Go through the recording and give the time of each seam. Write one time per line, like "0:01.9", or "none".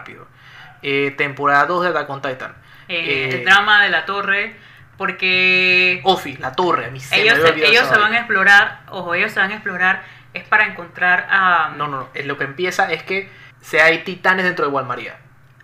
0:13.5